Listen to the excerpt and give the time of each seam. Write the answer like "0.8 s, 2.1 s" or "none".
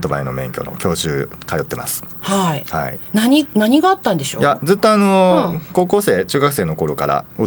none